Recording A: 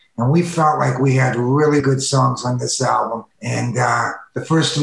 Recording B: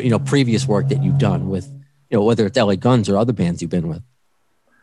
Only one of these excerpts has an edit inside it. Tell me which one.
A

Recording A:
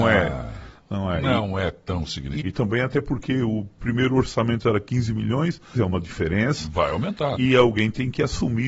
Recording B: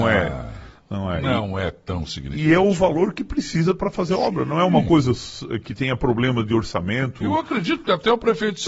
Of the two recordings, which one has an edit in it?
A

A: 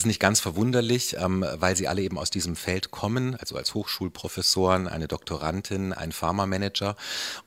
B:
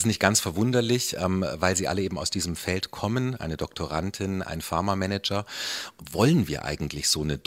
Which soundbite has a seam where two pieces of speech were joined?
B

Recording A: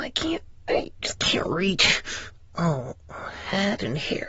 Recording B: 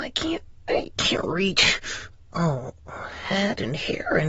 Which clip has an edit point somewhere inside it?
B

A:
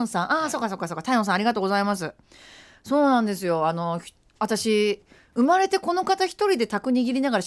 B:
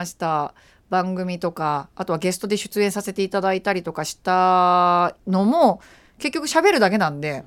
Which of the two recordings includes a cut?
B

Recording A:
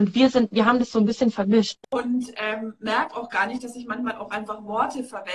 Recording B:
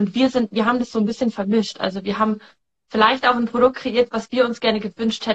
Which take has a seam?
A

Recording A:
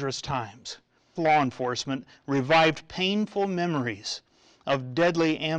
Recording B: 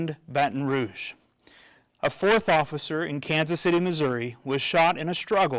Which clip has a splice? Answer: A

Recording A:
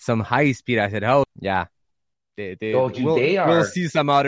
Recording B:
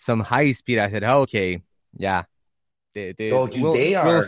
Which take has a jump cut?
A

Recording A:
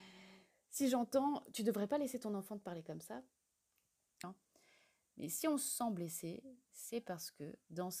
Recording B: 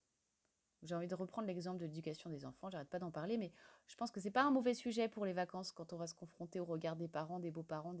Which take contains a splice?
A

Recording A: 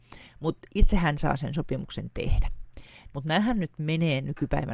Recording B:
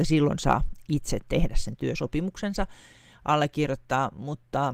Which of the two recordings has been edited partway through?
A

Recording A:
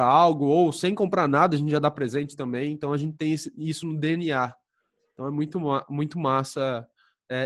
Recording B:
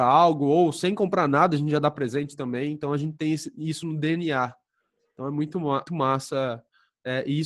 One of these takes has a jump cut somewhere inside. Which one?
B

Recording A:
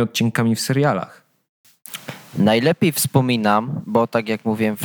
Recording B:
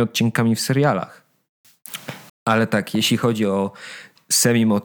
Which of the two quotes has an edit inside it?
B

